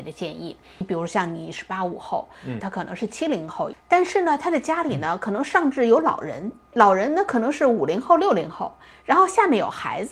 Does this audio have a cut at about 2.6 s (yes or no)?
yes